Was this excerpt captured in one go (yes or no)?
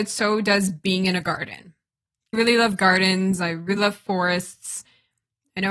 no